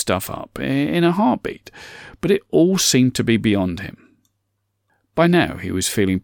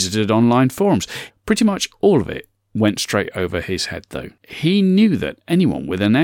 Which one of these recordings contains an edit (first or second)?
second